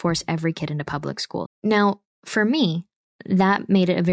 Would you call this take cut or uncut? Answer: cut